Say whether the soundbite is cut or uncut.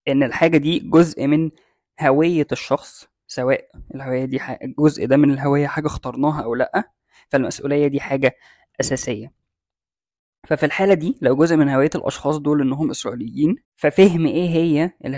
cut